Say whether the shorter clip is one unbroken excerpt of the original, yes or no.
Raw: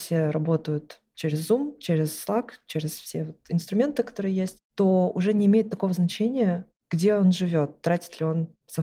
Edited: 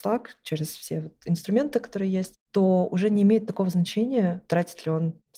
no